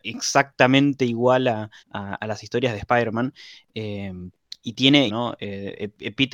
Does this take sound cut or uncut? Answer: cut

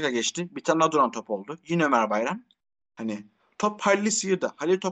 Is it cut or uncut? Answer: uncut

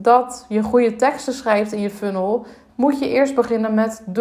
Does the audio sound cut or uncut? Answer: cut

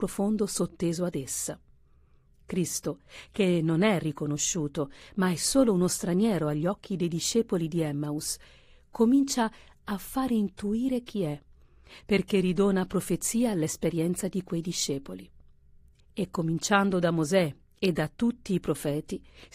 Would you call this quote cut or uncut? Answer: cut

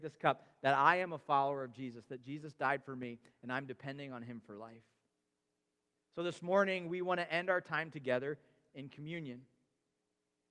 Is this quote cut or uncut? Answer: uncut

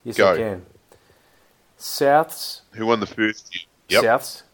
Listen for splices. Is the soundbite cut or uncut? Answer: uncut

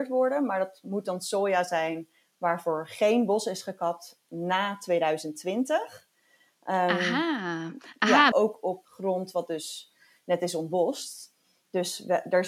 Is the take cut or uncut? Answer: cut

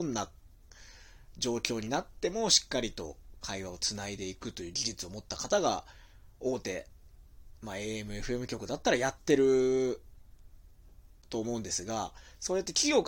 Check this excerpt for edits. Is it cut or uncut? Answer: uncut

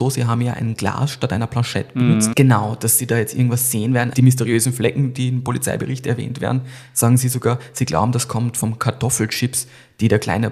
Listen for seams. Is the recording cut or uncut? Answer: cut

